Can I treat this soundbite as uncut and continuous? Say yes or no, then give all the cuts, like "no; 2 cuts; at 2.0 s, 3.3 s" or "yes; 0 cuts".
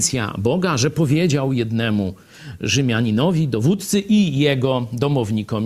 yes; 0 cuts